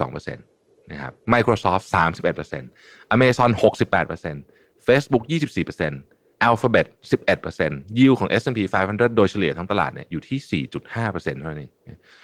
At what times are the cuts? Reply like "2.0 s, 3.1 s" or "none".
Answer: none